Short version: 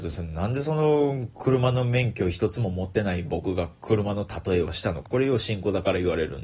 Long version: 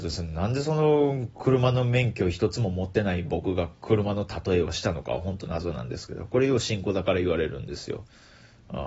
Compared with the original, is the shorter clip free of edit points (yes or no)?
no